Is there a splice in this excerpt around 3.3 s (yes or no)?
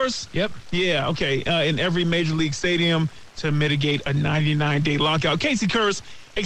yes